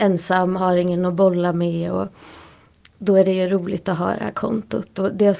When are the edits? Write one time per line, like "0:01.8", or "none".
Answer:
none

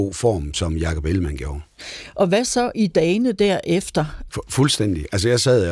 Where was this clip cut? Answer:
0:04.3

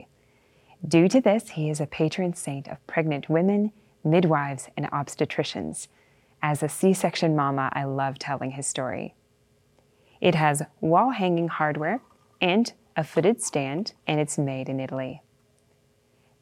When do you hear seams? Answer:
0:10.1
0:14.0

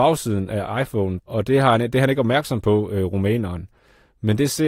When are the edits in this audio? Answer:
0:01.2

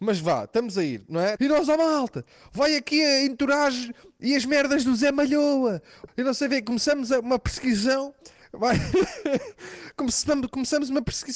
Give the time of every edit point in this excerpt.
0:01.4
0:06.1

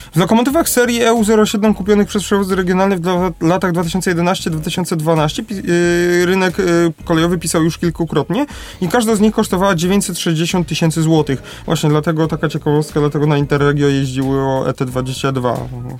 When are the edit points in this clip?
0:11.6

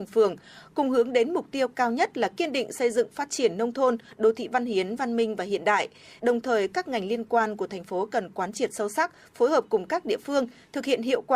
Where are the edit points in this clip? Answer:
0:06.2

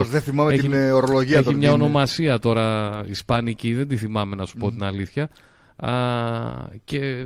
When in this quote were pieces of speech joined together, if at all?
none

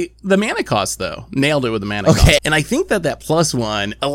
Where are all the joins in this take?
0:02.4

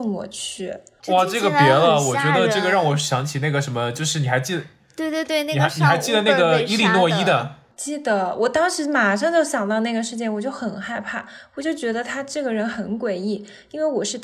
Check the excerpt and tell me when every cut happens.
none

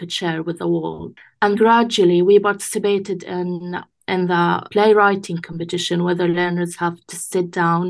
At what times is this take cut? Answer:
0:01.5
0:04.7

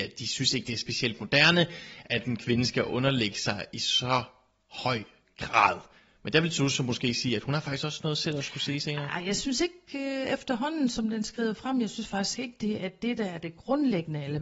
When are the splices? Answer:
none

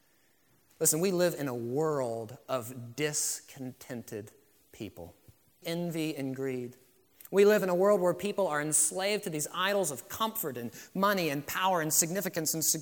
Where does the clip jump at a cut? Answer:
0:05.6

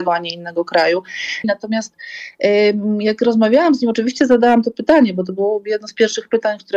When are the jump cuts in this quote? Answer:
0:01.4

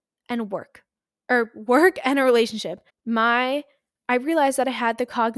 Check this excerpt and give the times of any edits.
0:02.9

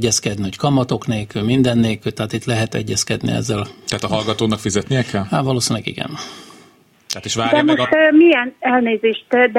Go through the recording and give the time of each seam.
none

